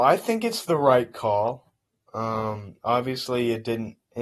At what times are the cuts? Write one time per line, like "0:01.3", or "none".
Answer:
none